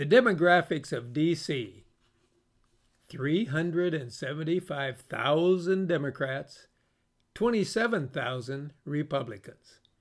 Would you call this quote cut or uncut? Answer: uncut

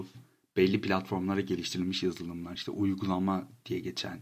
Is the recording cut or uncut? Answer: uncut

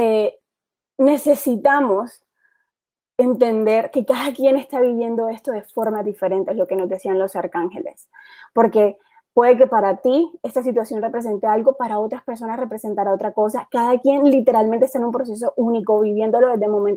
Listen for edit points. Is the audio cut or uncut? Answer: uncut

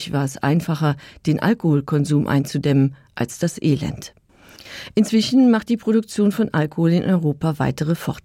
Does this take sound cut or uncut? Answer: uncut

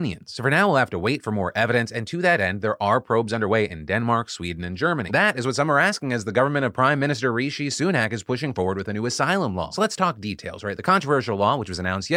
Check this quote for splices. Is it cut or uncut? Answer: cut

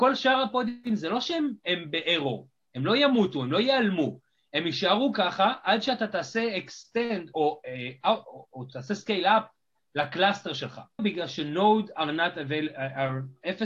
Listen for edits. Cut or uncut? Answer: cut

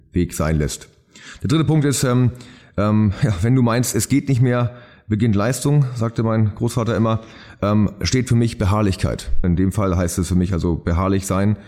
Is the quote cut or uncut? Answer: cut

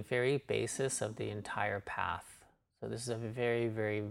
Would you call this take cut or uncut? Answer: uncut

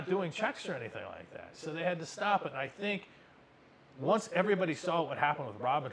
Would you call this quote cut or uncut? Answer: uncut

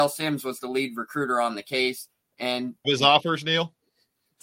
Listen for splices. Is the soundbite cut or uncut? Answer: cut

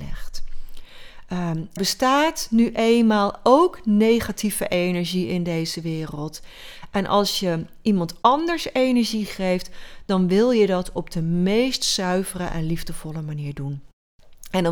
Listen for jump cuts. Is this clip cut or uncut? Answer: cut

